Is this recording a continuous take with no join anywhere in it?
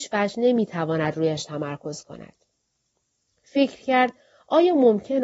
no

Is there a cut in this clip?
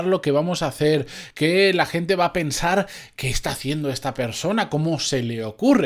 no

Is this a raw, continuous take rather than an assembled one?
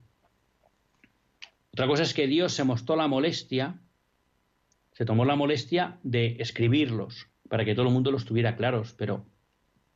no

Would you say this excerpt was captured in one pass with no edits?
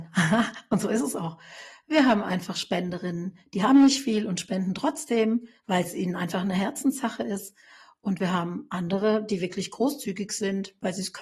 yes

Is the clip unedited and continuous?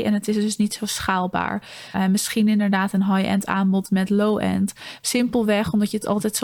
no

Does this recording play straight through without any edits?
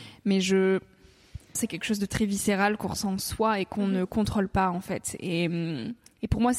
no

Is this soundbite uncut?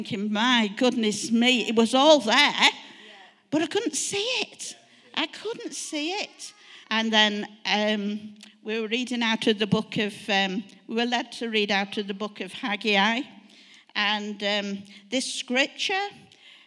no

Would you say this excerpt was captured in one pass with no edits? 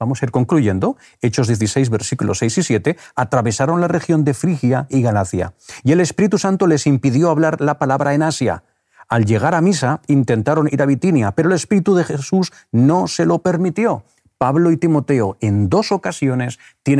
yes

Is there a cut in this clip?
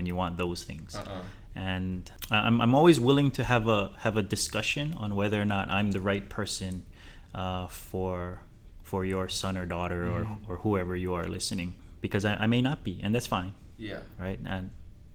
no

